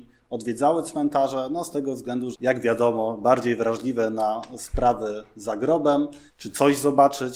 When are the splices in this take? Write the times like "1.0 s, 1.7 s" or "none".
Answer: 2.3 s, 6.3 s

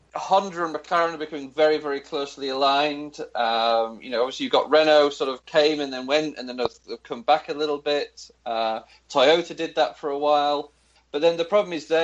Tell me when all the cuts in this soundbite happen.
11.0 s

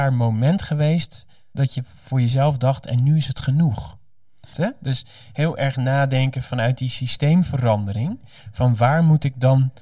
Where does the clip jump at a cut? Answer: 1.5 s, 4.5 s

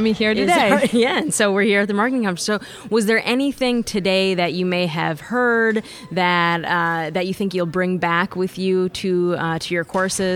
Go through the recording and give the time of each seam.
none

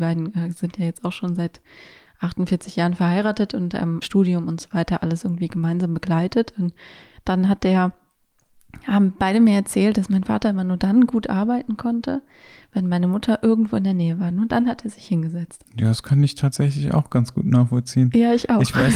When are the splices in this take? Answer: 4.0 s, 15.6 s

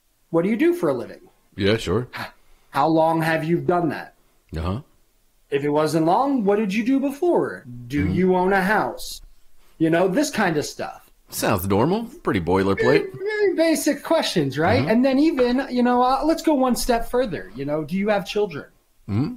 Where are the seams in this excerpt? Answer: 13.2 s

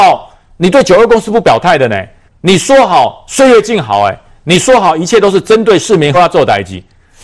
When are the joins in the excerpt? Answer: 2.3 s, 6.1 s

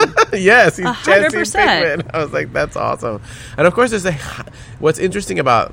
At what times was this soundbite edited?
none

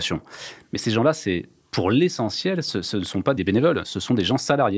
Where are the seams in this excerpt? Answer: none

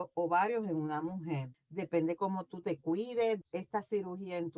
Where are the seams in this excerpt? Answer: 1.5 s, 3.4 s

